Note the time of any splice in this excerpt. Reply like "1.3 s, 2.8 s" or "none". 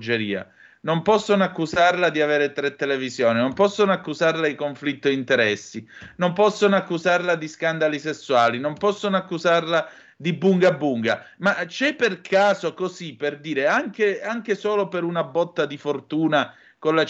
none

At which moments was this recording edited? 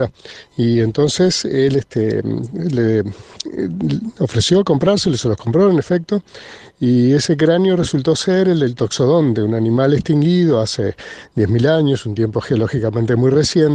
none

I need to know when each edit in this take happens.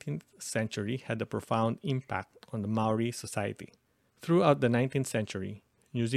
4.1 s

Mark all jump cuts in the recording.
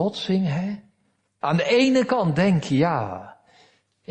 1.4 s

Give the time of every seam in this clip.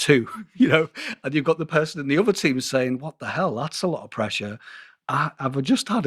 none

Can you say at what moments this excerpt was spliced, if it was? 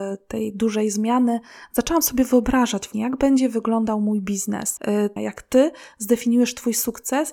5.2 s

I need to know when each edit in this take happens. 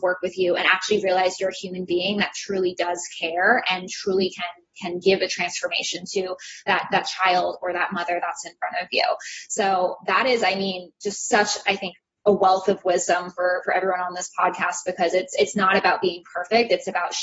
none

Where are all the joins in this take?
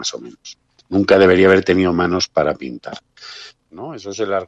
3.6 s

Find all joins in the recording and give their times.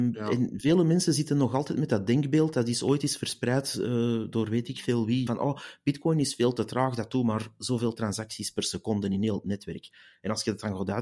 5.3 s

